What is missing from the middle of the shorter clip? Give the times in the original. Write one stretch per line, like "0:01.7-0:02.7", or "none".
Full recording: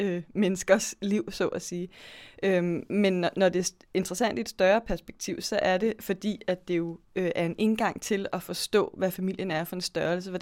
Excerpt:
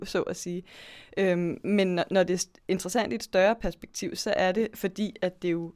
none